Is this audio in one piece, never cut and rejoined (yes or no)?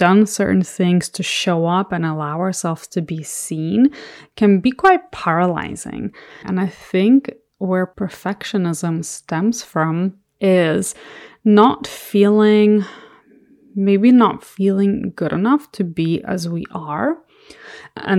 no